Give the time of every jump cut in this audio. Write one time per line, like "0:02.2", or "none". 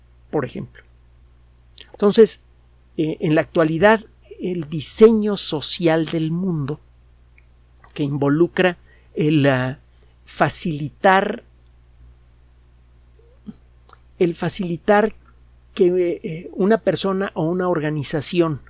0:01.9